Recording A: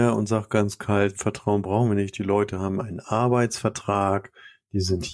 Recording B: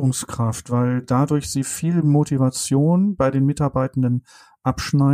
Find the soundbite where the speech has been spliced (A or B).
A